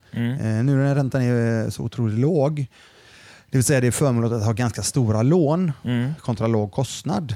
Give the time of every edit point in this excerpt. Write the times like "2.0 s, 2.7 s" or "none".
none

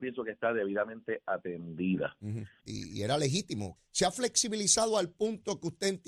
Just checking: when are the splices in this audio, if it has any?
2.6 s, 3.8 s

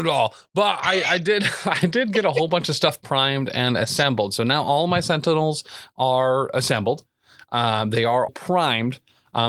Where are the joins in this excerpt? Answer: 8.3 s

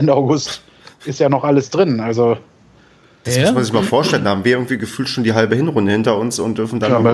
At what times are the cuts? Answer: none

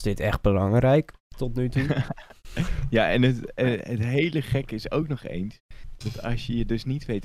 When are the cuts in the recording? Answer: none

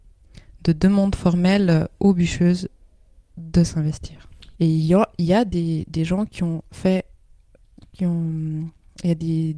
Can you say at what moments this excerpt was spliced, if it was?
4.6 s

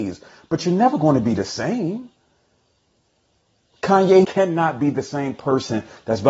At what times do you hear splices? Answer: 4.2 s

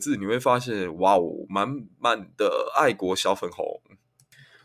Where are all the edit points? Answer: none

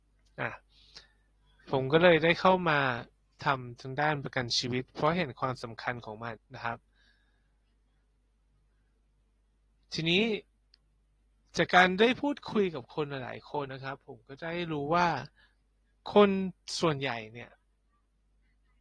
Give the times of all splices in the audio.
6.4 s, 13.7 s

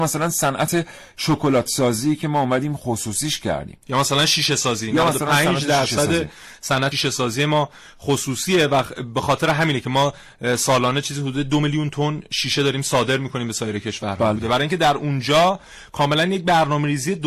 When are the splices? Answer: 6.9 s, 14.4 s

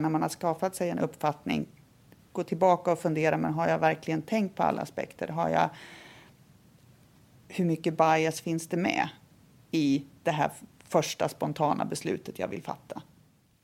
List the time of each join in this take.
none

